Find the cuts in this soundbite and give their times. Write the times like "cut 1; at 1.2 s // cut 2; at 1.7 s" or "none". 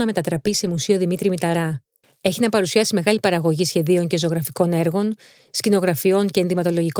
cut 1; at 2.0 s